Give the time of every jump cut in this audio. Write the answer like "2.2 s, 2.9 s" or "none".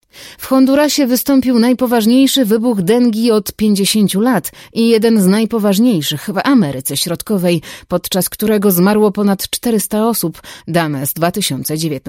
10.6 s